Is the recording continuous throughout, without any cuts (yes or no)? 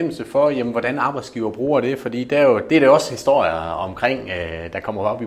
yes